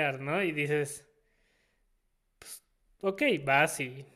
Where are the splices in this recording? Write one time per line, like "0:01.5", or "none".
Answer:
none